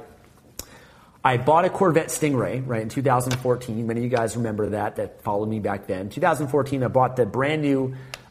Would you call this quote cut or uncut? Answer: uncut